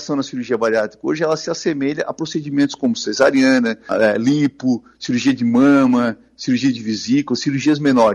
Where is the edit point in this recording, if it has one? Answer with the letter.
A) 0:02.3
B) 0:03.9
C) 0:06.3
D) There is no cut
B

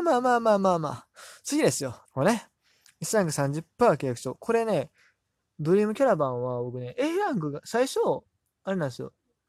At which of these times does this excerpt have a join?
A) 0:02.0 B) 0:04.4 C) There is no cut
A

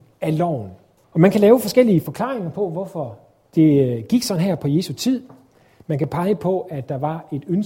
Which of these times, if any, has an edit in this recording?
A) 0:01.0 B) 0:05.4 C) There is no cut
A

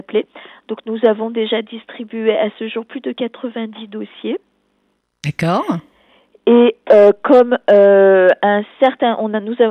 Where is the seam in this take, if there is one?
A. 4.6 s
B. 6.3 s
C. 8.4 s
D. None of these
D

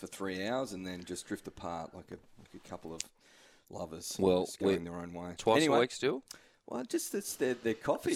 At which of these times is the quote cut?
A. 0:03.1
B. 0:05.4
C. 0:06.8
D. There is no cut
B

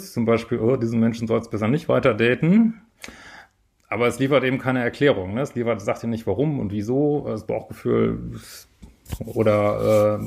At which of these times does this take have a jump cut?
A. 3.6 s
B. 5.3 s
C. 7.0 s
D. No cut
D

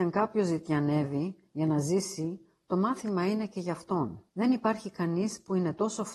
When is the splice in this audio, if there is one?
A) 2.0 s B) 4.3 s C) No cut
B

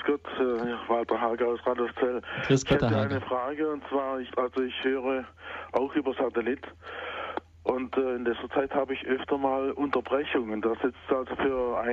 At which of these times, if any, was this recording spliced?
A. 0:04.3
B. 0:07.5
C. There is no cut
A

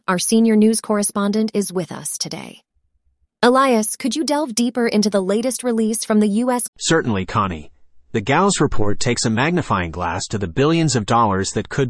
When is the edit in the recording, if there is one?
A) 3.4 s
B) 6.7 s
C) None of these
B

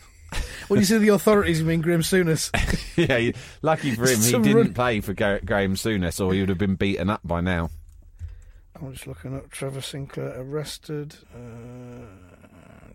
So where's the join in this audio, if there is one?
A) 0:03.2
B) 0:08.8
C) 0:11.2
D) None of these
C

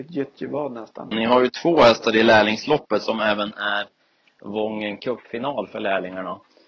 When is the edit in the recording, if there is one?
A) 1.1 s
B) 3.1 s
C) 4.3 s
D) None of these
A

